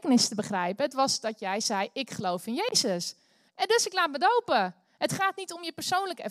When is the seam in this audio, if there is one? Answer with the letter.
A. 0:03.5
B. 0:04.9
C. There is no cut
A